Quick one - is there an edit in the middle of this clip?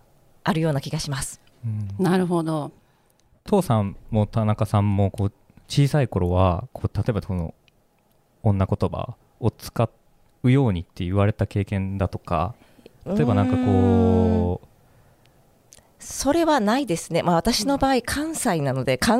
no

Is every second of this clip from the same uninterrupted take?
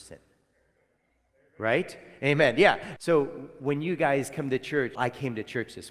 no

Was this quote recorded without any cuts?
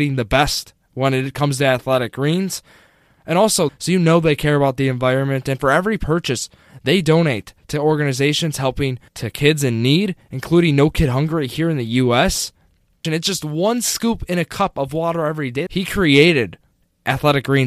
no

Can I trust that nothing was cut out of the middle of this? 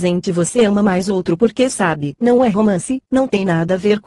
no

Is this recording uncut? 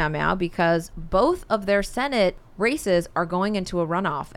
yes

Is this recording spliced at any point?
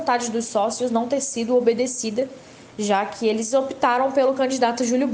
no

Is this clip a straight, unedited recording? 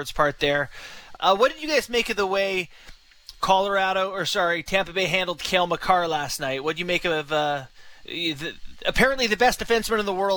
no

